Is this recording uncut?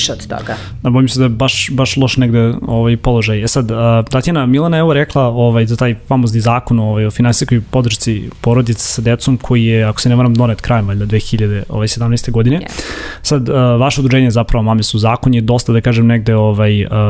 yes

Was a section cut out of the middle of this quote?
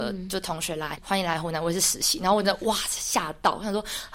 no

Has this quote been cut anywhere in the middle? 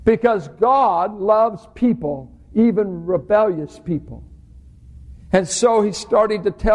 no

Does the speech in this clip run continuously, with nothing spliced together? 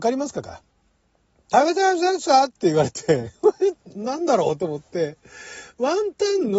yes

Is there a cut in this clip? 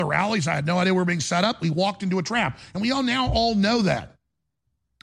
no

